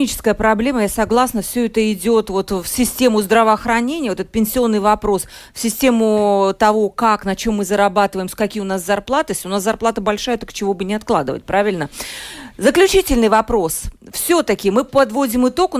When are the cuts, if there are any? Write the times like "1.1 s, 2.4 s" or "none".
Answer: none